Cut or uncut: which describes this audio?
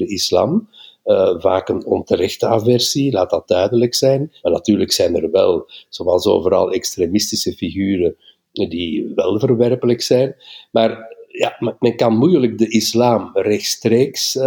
cut